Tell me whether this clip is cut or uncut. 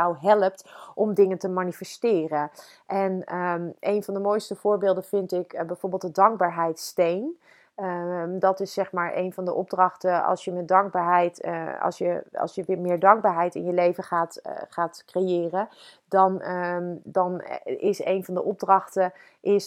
uncut